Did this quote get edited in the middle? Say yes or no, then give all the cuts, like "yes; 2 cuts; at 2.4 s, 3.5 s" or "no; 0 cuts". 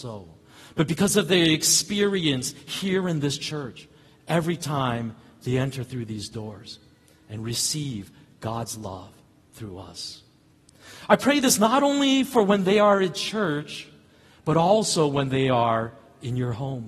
no; 0 cuts